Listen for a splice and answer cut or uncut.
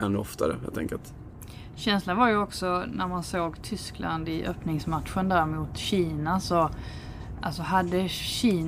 uncut